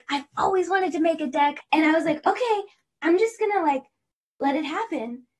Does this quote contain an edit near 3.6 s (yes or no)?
no